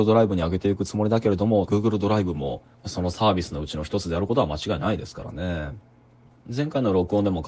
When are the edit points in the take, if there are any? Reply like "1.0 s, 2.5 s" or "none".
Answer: 1.7 s, 6.4 s

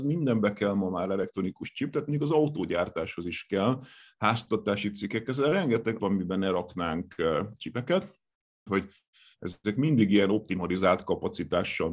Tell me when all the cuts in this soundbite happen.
6.0 s, 8.7 s

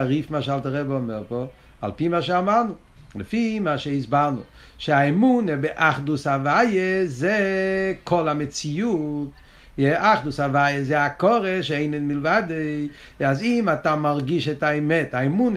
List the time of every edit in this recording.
none

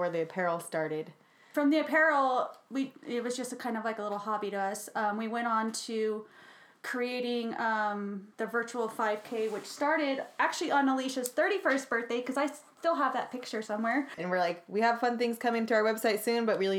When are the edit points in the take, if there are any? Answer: 8.3 s, 14.2 s

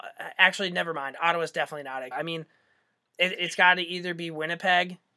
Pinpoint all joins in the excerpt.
2.1 s, 3.3 s

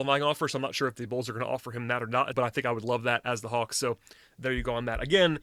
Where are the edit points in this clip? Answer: 2.3 s

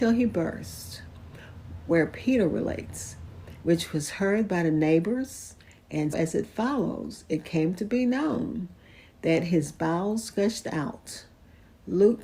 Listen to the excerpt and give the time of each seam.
3.6 s, 6.1 s

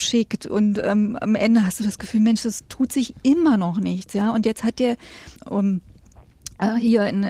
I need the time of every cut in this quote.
5.4 s

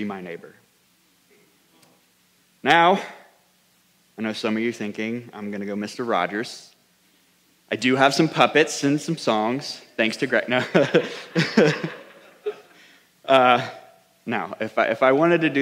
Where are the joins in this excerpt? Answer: none

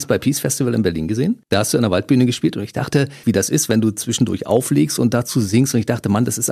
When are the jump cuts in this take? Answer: 3.2 s

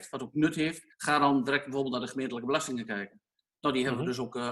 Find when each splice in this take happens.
0.9 s

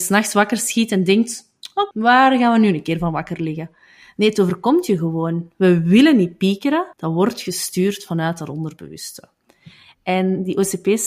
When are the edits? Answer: 1.9 s, 6.9 s, 9.9 s

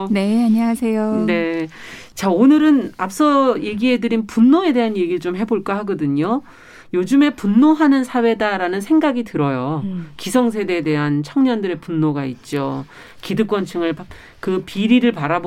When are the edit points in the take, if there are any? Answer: none

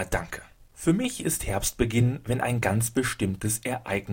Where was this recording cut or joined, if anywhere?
none

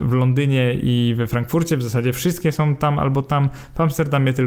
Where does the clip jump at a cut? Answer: none

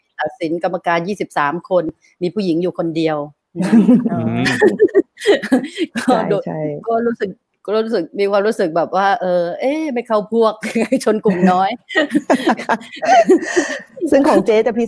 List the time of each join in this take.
none

